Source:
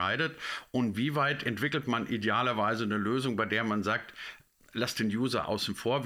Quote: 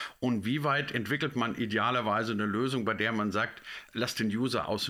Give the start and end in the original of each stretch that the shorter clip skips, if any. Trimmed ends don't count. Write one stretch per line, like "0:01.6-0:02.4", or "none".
0:04.4-0:04.7